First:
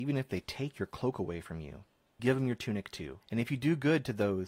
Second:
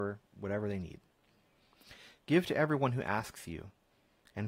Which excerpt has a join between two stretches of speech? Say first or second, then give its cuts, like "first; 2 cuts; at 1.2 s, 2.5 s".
first; 2 cuts; at 2.2 s, 3.2 s